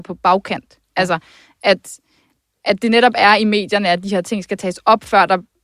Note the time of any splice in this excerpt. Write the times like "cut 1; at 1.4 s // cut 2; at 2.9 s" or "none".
none